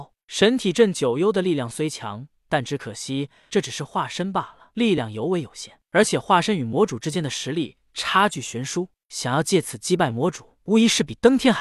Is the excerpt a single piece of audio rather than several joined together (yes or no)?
yes